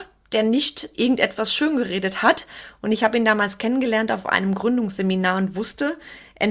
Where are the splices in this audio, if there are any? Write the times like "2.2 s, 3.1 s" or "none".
none

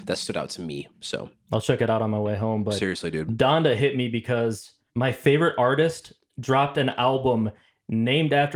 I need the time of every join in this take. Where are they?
4.9 s

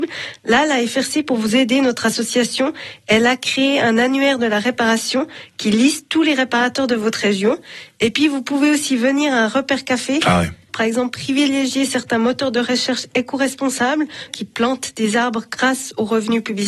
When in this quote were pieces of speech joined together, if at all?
10.7 s, 14.3 s

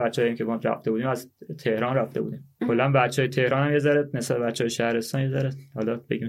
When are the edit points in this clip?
none

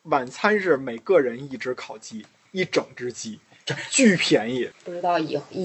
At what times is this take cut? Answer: 4.7 s

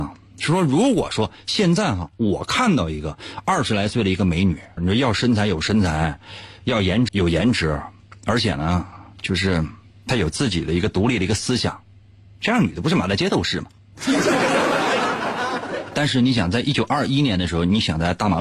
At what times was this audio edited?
4.8 s, 7.1 s

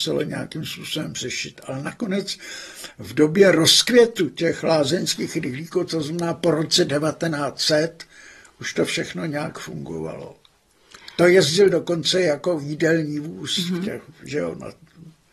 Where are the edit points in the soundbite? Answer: none

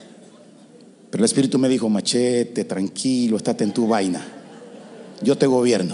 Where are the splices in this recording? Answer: none

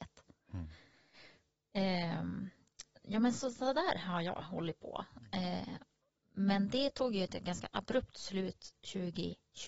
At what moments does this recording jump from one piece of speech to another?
none

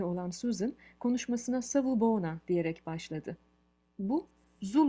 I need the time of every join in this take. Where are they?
none

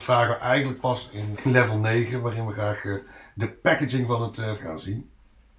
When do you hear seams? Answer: 1.3 s, 4.6 s

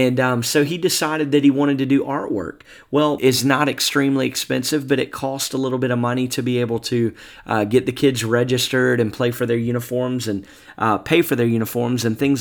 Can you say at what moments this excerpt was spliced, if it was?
3.2 s

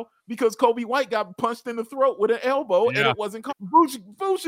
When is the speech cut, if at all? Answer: 3.5 s

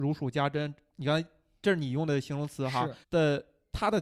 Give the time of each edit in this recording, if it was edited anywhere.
3.0 s

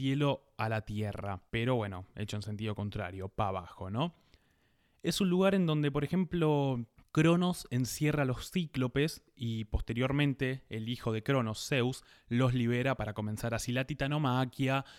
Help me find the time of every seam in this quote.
1.5 s

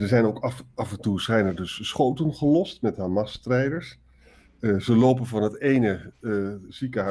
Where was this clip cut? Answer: none

